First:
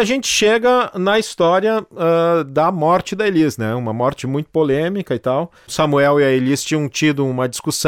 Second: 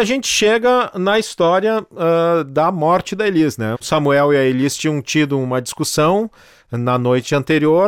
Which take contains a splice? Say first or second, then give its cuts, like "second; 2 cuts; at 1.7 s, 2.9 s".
second; 1 cut; at 3.7 s